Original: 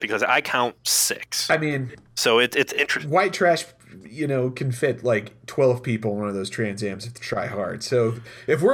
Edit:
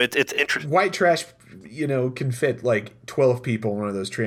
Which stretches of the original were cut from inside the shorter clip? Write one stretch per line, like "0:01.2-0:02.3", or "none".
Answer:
none